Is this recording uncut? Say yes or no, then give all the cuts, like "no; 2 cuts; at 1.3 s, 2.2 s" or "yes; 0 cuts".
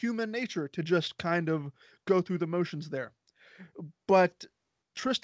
yes; 0 cuts